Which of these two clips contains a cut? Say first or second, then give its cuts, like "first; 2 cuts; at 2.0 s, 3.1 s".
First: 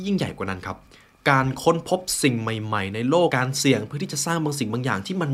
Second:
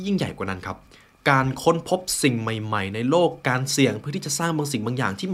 first; 1 cut; at 3.3 s